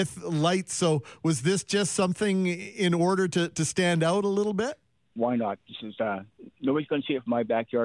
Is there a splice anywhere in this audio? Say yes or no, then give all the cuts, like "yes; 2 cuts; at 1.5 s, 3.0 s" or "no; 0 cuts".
yes; 1 cut; at 5.1 s